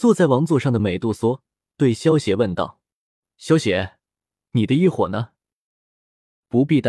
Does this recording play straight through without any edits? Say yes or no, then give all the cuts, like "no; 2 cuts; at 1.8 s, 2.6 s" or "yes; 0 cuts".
yes; 0 cuts